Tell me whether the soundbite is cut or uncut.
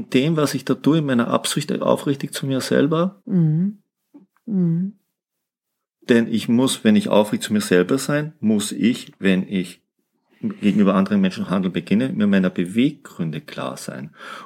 cut